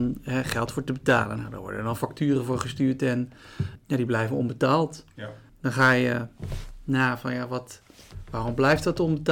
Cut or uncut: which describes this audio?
uncut